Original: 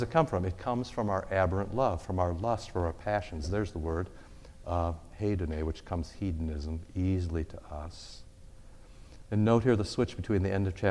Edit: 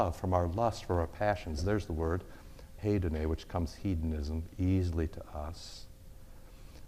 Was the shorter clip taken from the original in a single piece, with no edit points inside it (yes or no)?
no